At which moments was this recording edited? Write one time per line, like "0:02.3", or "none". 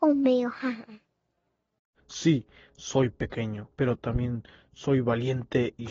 0:03.7